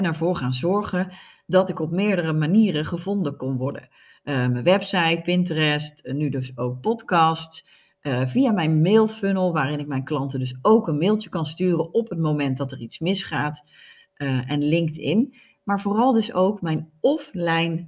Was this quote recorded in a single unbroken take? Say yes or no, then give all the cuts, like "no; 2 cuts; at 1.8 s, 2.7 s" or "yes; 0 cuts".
yes; 0 cuts